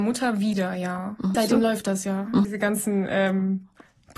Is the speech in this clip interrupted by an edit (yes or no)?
yes